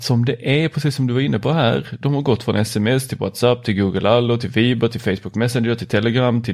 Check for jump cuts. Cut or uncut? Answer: uncut